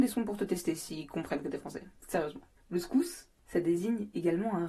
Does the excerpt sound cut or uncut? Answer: uncut